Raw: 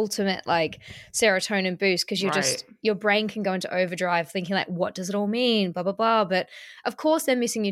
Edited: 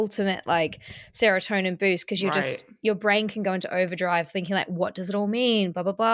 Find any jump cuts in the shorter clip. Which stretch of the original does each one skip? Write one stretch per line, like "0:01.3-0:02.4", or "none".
none